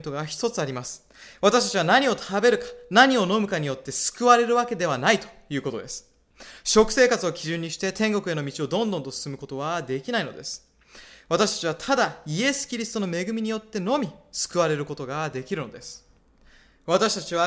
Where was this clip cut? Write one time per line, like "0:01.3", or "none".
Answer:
none